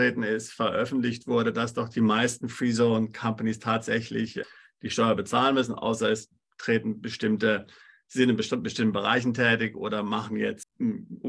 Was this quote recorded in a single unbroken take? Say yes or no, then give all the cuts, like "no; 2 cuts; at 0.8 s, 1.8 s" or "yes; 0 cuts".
yes; 0 cuts